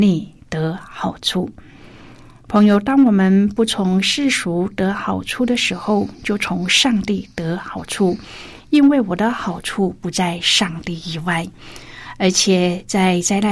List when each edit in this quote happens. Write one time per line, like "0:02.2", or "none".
none

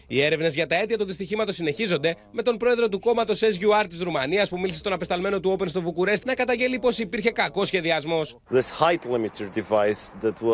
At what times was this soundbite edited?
0:06.2

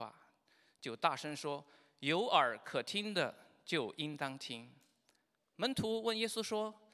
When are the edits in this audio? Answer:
none

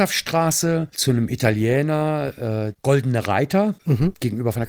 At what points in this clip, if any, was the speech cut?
none

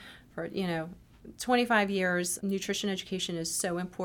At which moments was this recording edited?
0:02.4

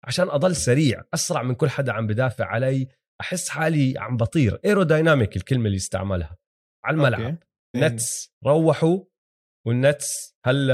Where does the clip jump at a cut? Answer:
0:07.7

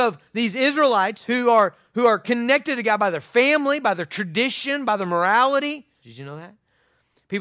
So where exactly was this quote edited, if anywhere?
0:06.0

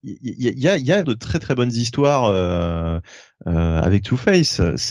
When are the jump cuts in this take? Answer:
0:01.0

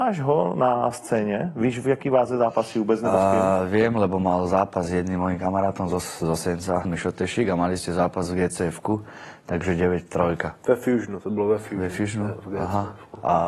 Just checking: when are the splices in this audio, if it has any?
0:06.8

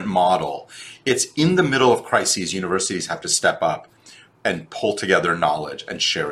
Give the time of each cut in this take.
none

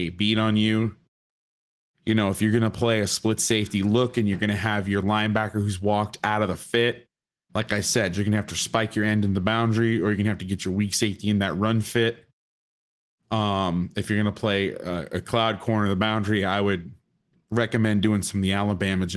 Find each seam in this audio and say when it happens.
none

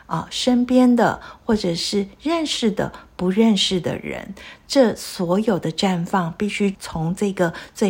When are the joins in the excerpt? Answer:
0:06.7

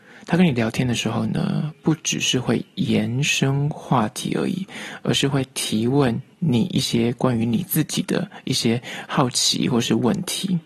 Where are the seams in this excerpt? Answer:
0:06.3

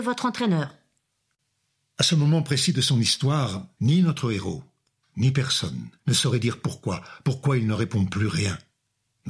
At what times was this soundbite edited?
0:03.8
0:06.0

